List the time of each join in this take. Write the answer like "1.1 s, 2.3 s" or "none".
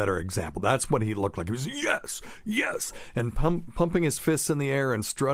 none